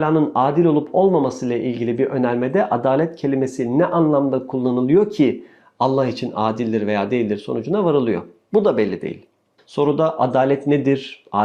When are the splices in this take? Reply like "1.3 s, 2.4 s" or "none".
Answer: 9.6 s